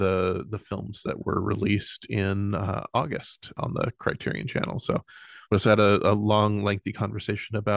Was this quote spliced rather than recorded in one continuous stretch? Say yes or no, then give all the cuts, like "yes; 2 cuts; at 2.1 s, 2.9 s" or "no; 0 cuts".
no; 0 cuts